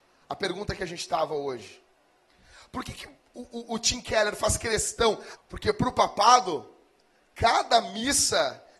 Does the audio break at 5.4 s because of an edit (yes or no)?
yes